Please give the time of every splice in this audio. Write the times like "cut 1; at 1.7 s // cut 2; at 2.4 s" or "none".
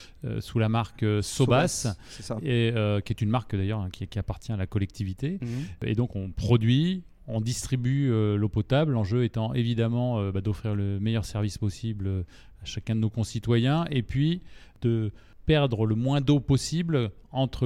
none